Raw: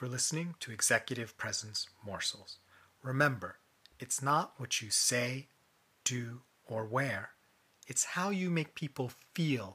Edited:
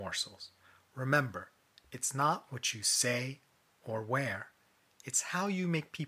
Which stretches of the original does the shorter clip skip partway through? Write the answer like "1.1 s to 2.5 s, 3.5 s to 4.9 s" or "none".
5.9 s to 6.6 s